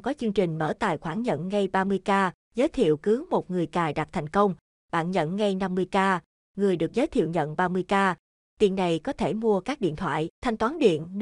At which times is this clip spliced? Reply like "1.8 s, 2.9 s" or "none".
none